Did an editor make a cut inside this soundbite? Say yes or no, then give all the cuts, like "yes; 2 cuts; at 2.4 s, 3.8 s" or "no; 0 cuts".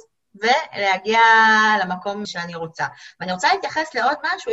yes; 1 cut; at 2.2 s